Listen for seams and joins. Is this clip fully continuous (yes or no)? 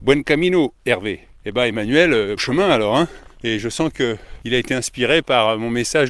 no